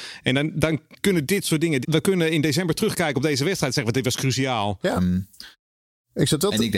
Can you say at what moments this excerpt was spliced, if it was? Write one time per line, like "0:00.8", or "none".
0:01.8
0:05.0